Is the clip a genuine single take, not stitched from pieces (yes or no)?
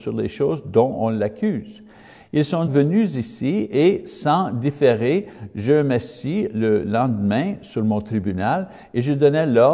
no